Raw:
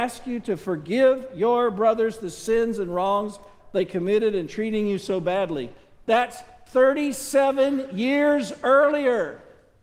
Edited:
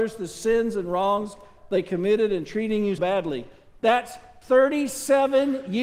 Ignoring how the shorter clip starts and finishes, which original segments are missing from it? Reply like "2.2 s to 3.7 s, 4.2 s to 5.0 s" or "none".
5.0 s to 5.2 s